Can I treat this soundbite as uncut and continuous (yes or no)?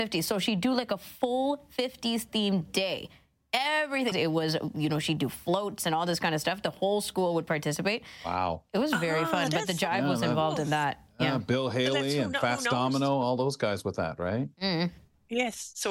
no